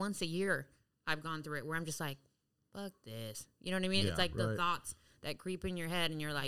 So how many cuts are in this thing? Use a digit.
0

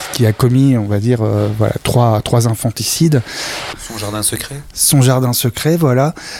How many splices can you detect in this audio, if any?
1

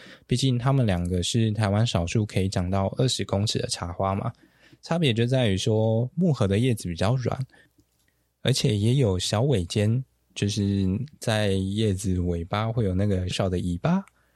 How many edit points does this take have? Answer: 1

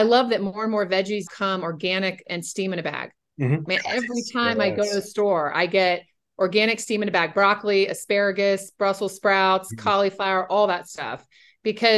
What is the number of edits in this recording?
2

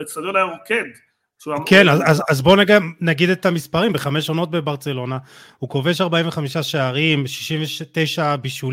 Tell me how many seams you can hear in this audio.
0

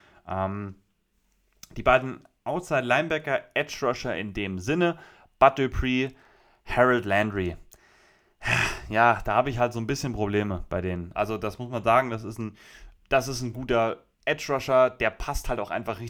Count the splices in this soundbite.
2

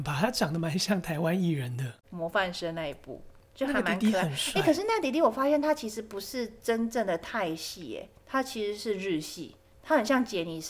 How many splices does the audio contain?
1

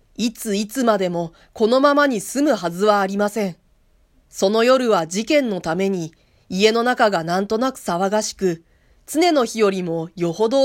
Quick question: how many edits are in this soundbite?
1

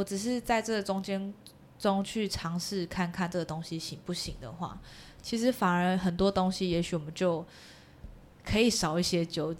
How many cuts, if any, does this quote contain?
0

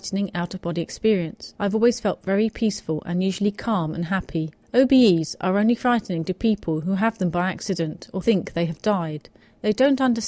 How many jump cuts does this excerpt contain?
2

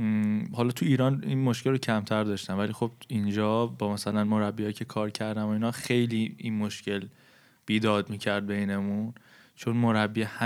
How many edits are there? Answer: 0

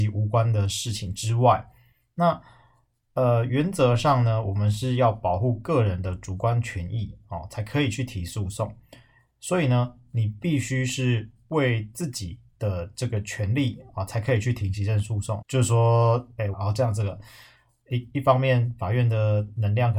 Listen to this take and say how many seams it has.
2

